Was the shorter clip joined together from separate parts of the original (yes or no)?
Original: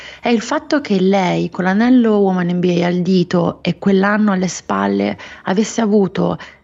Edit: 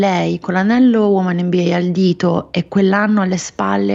no